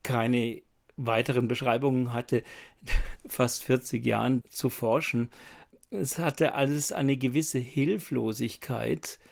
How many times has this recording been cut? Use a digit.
2